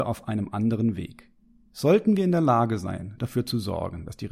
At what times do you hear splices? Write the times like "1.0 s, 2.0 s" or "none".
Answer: none

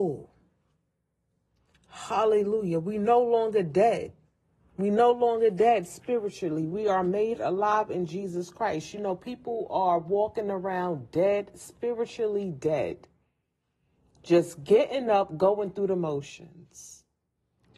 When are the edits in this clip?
none

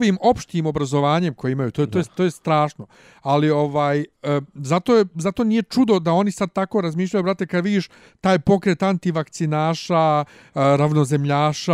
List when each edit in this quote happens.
none

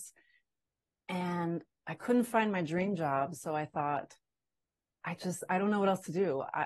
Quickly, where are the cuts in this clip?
none

